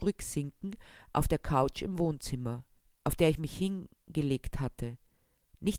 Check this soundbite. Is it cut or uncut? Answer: uncut